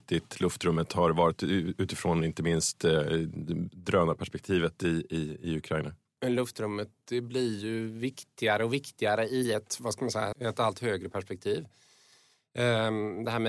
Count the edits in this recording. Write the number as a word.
two